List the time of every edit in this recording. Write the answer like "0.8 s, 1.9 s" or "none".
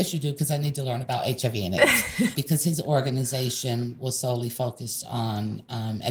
2.3 s